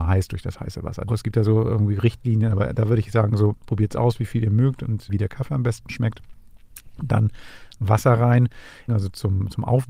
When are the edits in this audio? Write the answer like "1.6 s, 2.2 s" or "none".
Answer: 1.1 s, 5.1 s, 8.9 s